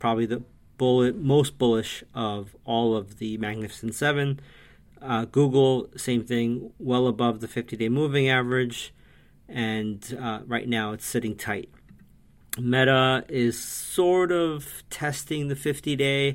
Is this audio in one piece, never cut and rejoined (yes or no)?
yes